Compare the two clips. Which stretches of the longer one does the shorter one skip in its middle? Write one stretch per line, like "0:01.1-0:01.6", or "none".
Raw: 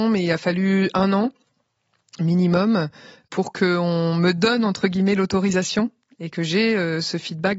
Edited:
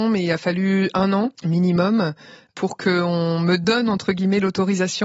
0:01.3-0:02.1